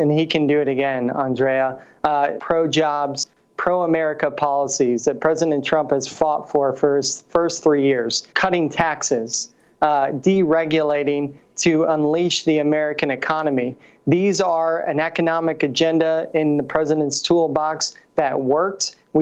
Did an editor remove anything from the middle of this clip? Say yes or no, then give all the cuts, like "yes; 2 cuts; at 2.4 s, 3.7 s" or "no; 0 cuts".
yes; 2 cuts; at 2.4 s, 8.3 s